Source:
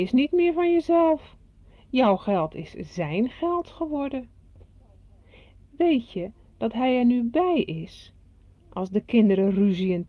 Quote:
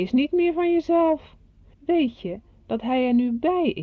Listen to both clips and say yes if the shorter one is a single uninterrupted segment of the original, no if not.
no